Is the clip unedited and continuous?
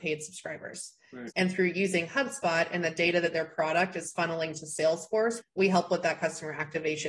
no; 2 cuts; at 1.3 s, 5.4 s

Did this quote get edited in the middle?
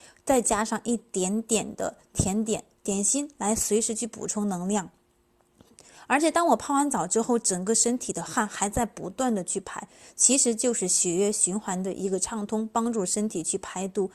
no; 0 cuts

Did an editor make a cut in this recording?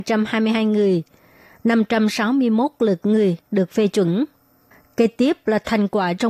no; 0 cuts

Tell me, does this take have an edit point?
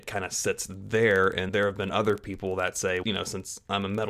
yes; 2 cuts; at 1.5 s, 3.0 s

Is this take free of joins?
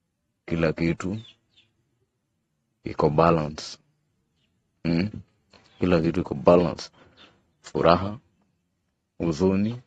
yes; 0 cuts

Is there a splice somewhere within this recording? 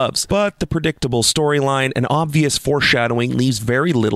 no; 0 cuts

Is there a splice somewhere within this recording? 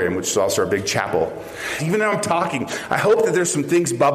yes; 1 cut; at 1.8 s

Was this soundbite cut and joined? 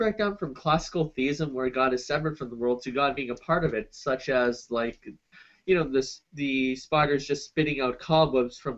no; 0 cuts

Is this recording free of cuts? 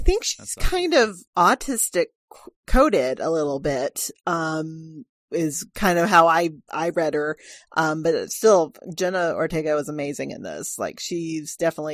yes; 0 cuts

